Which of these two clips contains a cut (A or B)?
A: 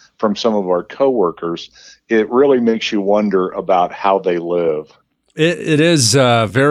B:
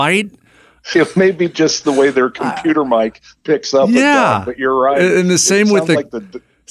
B